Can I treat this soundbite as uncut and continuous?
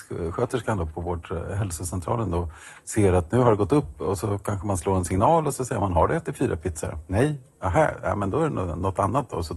yes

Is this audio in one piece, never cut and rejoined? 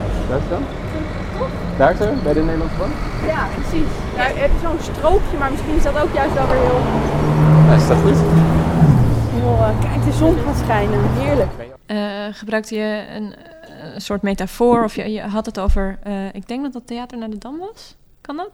no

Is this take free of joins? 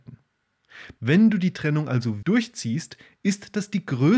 no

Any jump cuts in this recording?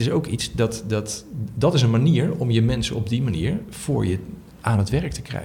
no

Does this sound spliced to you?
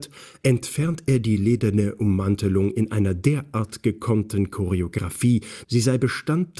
yes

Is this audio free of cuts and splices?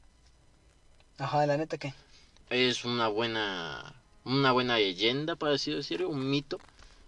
no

